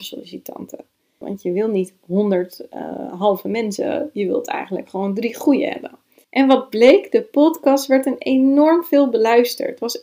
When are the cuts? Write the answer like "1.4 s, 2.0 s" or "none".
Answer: 1.2 s, 6.2 s